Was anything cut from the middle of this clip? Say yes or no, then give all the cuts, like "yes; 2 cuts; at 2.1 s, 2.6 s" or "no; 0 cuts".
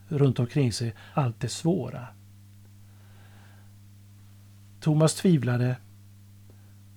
yes; 1 cut; at 1.1 s